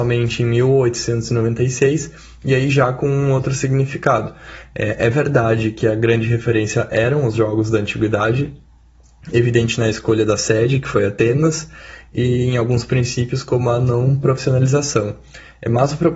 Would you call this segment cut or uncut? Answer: uncut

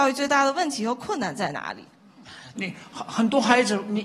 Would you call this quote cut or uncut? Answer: cut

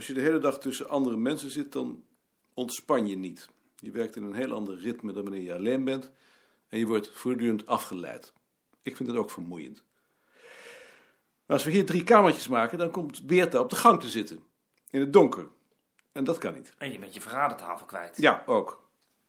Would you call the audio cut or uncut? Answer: uncut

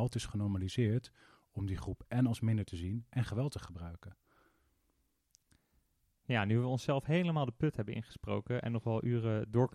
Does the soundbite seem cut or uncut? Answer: uncut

